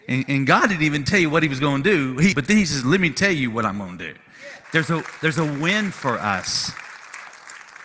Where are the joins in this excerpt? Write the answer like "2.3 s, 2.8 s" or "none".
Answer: 2.3 s, 4.6 s